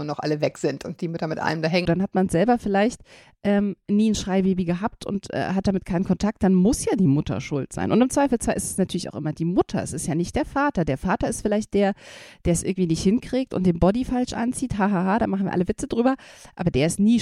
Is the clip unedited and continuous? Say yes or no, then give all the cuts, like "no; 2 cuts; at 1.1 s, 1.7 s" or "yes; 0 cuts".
no; 1 cut; at 1.9 s